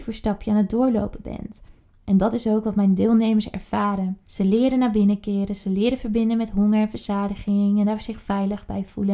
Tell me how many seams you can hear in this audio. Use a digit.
2